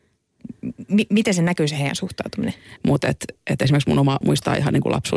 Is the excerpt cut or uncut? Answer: cut